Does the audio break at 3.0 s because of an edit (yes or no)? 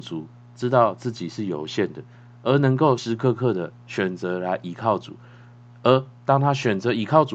yes